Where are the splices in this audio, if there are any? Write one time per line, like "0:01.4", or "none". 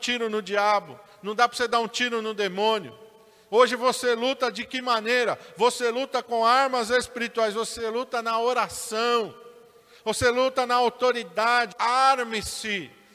0:11.7